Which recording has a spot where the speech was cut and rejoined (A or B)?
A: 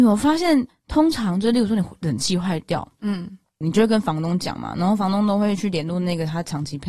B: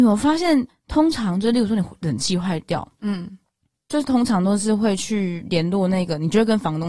A